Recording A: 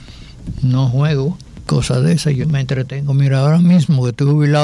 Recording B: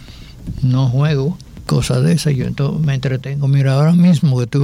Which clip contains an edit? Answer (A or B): A